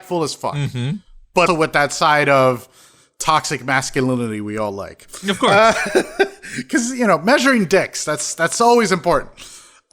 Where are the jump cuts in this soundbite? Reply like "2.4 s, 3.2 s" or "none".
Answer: 1.5 s